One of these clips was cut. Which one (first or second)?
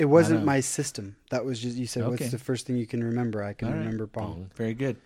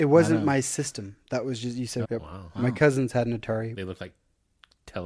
second